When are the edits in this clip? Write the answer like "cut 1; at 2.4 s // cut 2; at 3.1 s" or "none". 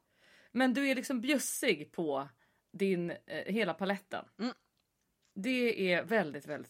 none

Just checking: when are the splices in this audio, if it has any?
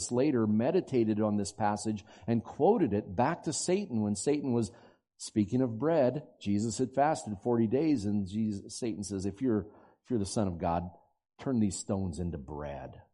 none

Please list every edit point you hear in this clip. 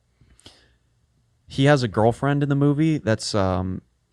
none

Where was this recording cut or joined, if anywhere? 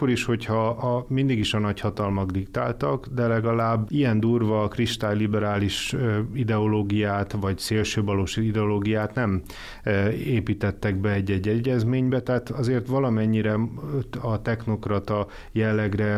cut 1; at 3.9 s

